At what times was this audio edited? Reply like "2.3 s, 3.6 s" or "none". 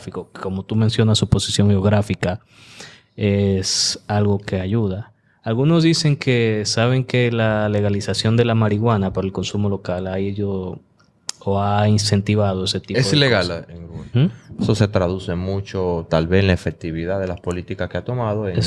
14.1 s